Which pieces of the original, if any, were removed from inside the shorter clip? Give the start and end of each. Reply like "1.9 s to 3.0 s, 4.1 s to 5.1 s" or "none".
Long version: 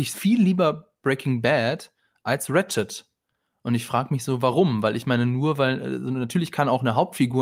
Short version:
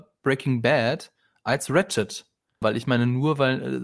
3.4 s to 4.8 s